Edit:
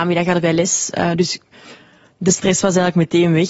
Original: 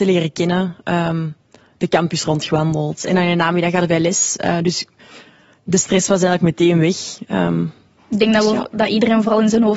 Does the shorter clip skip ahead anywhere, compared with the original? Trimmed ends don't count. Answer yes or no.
no